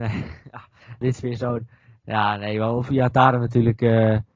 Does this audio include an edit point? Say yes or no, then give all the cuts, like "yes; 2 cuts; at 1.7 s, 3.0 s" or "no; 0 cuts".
yes; 1 cut; at 1.0 s